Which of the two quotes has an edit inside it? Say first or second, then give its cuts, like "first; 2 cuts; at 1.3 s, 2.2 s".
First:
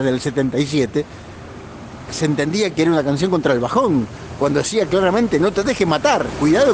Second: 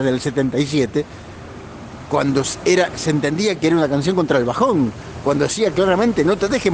first; 1 cut; at 2.1 s